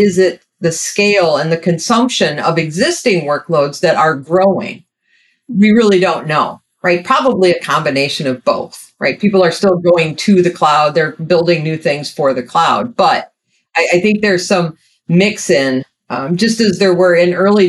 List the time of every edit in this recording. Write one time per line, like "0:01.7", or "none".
none